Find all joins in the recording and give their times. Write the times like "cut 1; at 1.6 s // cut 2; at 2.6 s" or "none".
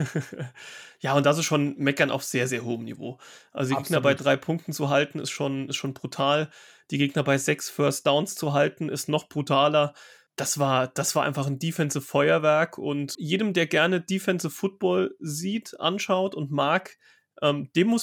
cut 1; at 13.1 s